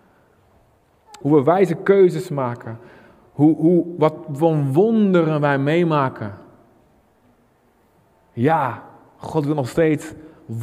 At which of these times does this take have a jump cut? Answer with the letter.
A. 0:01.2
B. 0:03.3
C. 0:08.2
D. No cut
A